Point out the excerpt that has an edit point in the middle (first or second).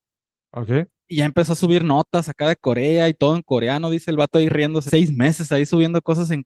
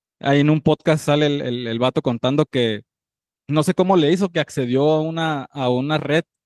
first